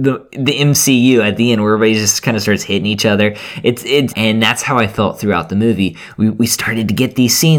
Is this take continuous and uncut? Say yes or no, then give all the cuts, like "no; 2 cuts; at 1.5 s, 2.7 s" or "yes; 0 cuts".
no; 1 cut; at 4.1 s